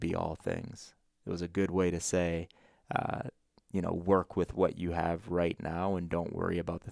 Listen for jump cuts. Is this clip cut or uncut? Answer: uncut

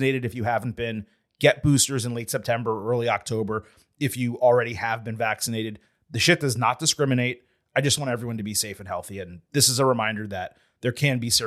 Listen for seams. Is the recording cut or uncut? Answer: uncut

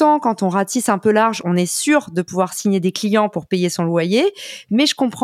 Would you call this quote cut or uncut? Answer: uncut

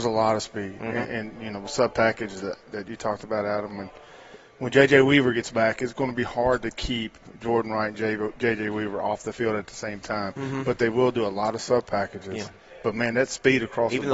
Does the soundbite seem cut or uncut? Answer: uncut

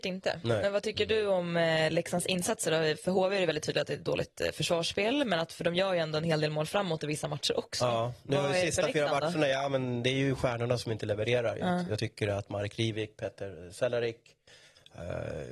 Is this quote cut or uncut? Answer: uncut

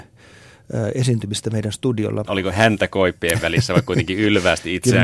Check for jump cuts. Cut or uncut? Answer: cut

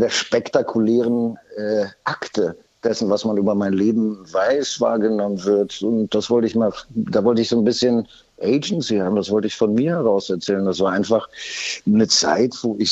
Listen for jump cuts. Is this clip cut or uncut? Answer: uncut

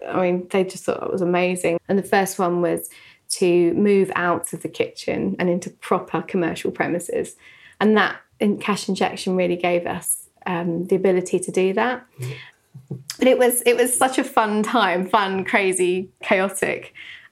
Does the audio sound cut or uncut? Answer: cut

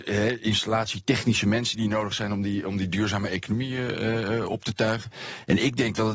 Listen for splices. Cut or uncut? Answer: uncut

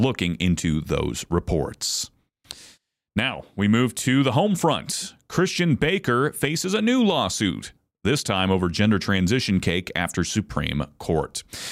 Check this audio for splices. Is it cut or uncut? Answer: uncut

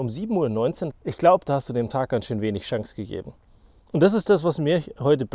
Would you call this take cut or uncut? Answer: cut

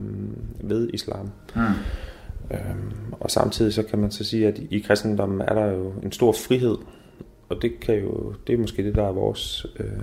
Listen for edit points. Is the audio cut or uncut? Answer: uncut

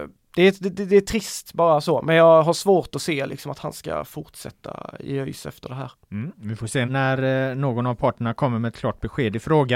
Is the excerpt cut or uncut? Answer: cut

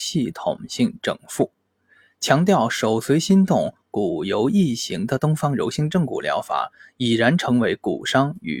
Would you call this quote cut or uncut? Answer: uncut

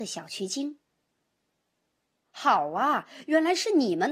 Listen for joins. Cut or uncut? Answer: uncut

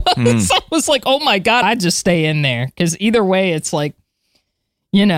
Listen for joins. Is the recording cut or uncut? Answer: cut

